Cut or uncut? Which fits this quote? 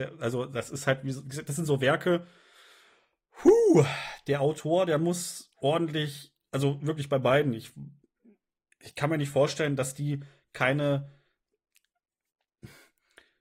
uncut